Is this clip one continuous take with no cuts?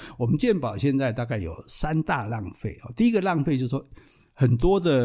yes; 0 cuts

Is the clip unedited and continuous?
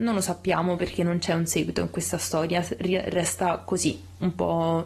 yes; 0 cuts

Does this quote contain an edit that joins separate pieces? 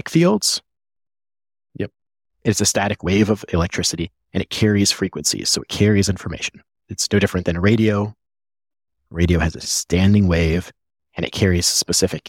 no; 0 cuts

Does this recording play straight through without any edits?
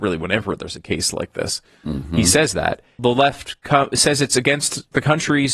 no; 1 cut; at 3.0 s

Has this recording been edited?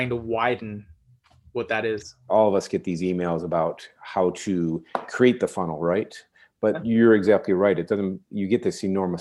yes; 1 cut; at 2.3 s

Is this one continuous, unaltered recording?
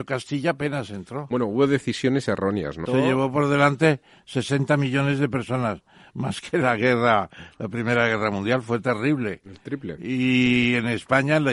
no; 1 cut; at 2.9 s

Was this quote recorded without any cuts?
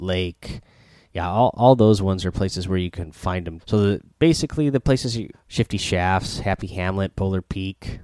no; 2 cuts; at 3.6 s, 5.3 s

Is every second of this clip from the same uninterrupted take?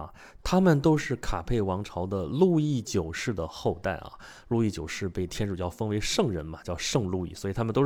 yes; 0 cuts

